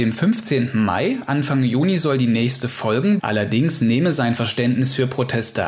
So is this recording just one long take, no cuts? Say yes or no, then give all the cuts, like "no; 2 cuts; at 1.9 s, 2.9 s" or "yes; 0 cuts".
no; 1 cut; at 3.2 s